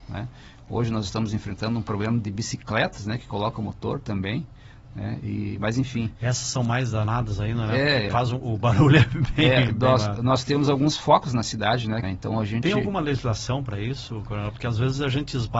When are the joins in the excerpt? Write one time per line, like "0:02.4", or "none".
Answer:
0:08.1
0:12.0